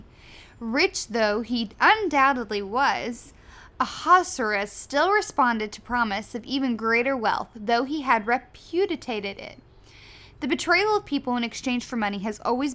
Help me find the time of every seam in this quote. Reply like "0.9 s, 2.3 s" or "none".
none